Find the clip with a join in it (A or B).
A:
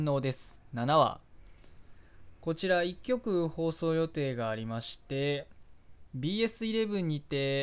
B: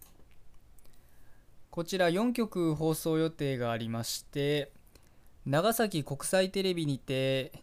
B